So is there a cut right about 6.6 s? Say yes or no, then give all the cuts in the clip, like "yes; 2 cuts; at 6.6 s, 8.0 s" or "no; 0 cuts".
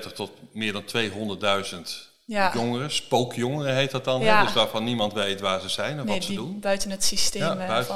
no; 0 cuts